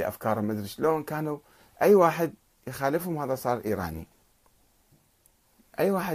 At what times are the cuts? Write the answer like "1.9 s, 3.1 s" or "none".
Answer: none

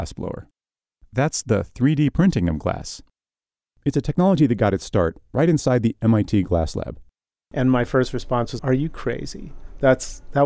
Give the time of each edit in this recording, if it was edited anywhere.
7.5 s, 8.6 s

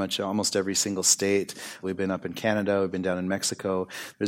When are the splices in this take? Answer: 1.8 s

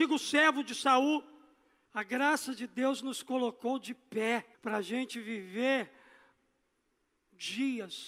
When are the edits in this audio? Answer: 1.9 s, 4.5 s

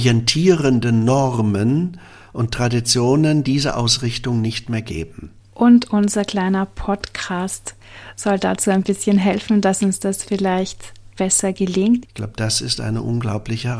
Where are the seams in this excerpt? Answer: 5.4 s, 12.0 s

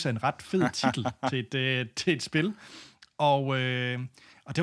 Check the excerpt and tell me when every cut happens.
none

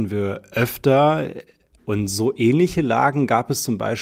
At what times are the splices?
1.8 s

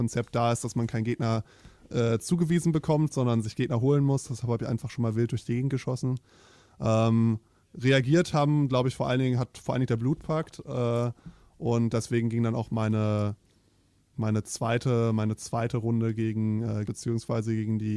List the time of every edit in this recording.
16.8 s

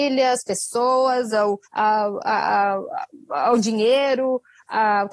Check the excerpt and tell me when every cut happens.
1.7 s

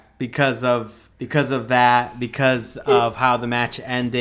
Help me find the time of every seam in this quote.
1.1 s

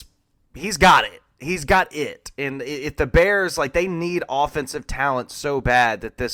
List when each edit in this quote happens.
none

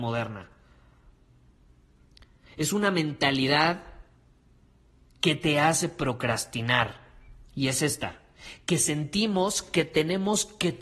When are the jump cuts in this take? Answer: none

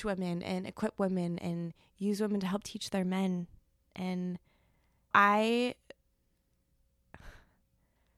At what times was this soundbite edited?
5.1 s

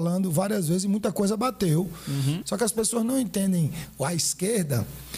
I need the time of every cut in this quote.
2.4 s

